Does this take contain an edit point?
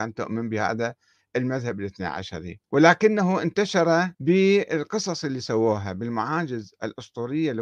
yes; 2 cuts; at 2.6 s, 4.1 s

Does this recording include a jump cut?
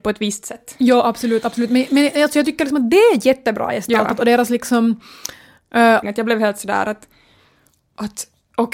yes; 1 cut; at 6.0 s

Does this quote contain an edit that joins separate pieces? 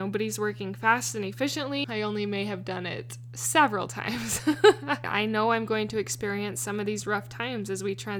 yes; 2 cuts; at 1.8 s, 5.0 s

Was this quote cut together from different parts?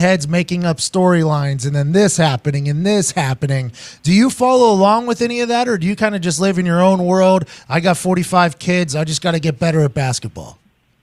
no; 0 cuts

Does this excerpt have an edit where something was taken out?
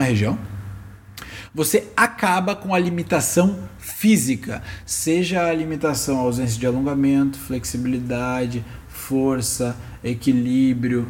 no; 0 cuts

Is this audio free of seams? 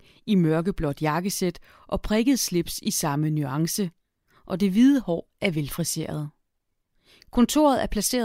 yes; 0 cuts

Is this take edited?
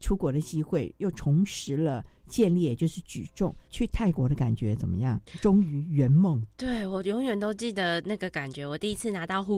no; 0 cuts

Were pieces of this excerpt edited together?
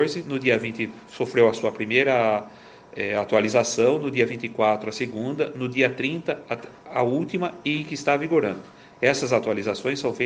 no; 0 cuts

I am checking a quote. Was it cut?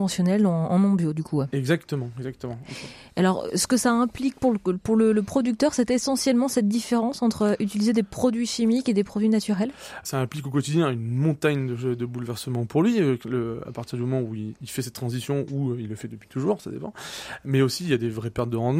no; 0 cuts

